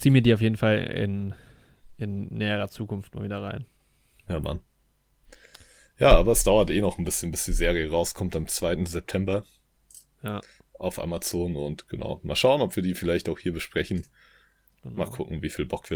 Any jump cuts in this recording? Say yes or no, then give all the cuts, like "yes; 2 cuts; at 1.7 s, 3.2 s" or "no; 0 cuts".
no; 0 cuts